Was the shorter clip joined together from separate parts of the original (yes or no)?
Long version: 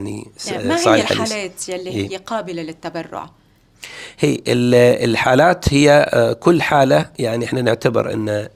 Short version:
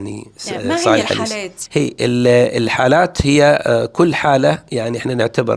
yes